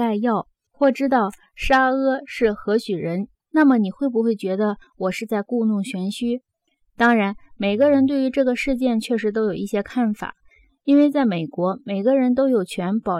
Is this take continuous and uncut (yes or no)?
no